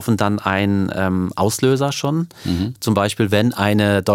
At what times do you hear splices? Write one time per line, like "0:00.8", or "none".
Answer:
none